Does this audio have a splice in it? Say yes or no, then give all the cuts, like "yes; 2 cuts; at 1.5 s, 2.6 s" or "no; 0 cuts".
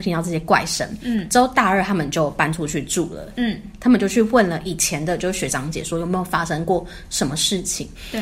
no; 0 cuts